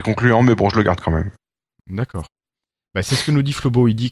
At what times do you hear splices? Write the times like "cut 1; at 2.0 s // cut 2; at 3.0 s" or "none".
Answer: none

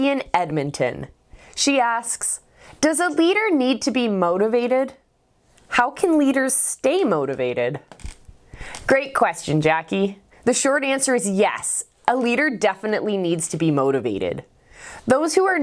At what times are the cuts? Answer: none

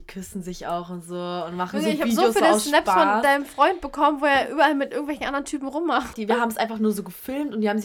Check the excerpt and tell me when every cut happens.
cut 1; at 6.1 s

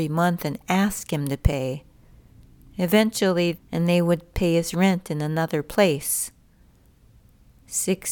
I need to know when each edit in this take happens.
cut 1; at 3.5 s

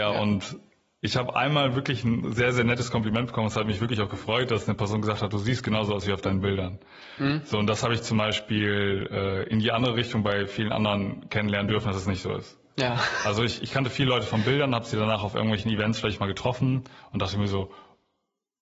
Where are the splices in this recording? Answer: none

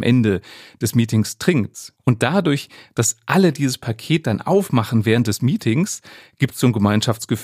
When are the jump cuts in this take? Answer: cut 1; at 2.0 s

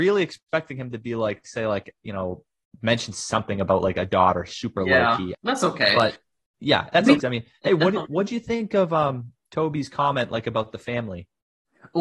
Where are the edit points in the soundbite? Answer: cut 1; at 5.3 s // cut 2; at 7.2 s

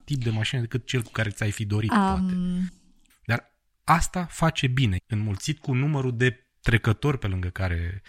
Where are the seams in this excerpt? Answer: cut 1; at 3.1 s // cut 2; at 5.0 s

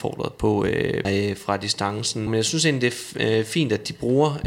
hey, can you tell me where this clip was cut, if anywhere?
cut 1; at 1.0 s // cut 2; at 2.3 s

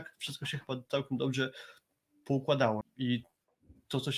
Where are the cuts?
cut 1; at 2.8 s

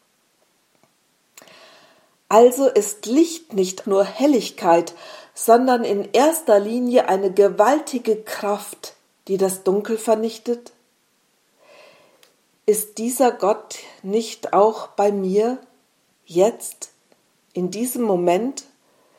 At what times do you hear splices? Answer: cut 1; at 3.8 s // cut 2; at 12.5 s

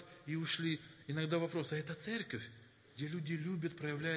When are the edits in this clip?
none

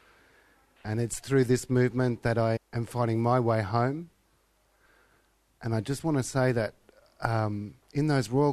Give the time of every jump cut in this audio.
cut 1; at 2.6 s

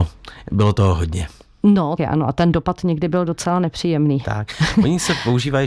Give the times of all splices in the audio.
cut 1; at 2.0 s

